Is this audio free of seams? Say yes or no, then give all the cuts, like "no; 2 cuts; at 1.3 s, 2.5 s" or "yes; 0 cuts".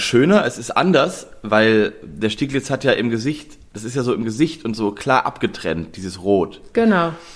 yes; 0 cuts